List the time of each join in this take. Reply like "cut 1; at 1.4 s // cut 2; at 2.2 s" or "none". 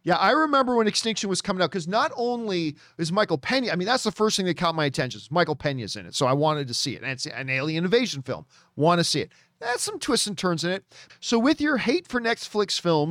cut 1; at 11.1 s